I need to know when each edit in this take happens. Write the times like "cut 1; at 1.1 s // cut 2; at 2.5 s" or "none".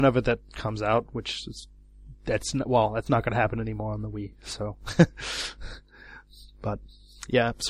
none